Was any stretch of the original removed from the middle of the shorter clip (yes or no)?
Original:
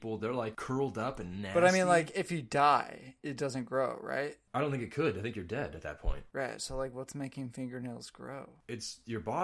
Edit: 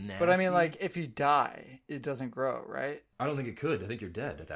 no